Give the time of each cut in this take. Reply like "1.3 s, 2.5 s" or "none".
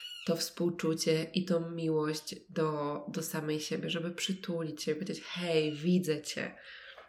none

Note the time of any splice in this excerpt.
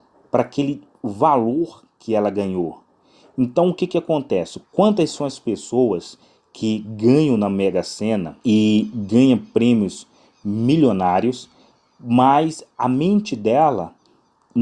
4.6 s, 8.4 s

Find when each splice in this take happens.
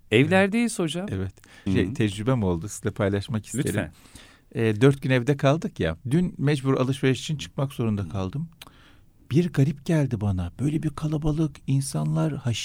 1.7 s, 6.0 s

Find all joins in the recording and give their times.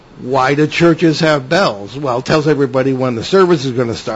none

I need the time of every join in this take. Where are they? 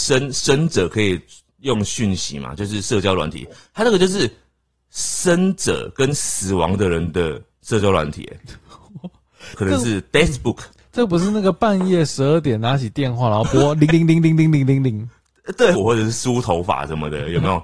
9.5 s, 13.9 s, 15.7 s

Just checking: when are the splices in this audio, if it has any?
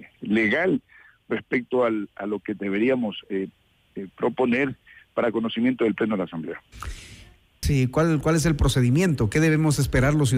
7.6 s

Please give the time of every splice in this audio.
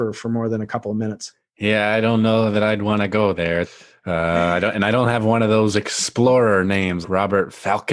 3.6 s, 7.0 s

